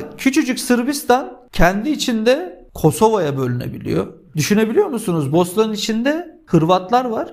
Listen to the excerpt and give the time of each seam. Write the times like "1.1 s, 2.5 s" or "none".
4.3 s